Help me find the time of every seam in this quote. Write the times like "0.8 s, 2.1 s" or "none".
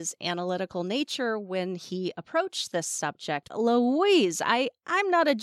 3.5 s